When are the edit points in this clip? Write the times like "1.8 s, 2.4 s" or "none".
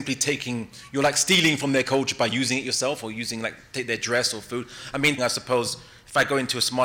5.2 s